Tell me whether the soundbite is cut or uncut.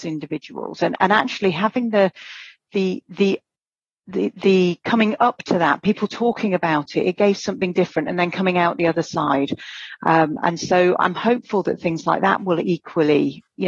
uncut